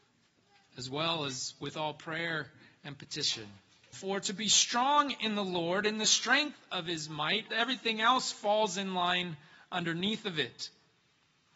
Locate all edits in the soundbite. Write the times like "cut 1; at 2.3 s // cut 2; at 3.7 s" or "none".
cut 1; at 3.9 s // cut 2; at 7.5 s